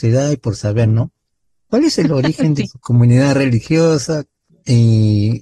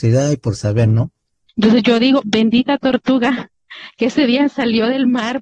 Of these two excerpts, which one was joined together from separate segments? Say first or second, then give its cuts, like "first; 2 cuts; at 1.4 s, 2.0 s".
second; 1 cut; at 1.5 s